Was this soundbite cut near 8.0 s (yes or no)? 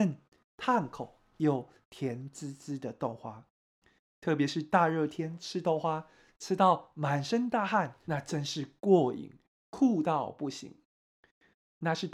yes